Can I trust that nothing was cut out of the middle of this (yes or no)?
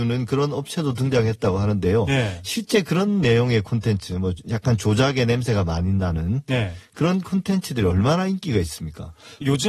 yes